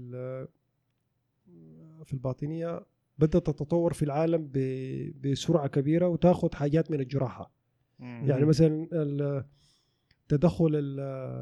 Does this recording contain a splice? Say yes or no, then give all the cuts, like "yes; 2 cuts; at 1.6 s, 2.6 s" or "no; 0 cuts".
no; 0 cuts